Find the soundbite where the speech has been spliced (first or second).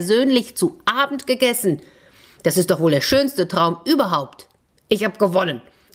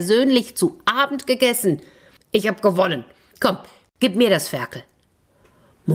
second